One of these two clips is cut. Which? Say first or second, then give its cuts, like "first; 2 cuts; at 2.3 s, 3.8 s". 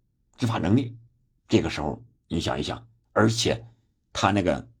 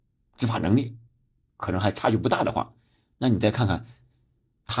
first; 2 cuts; at 1.4 s, 3.1 s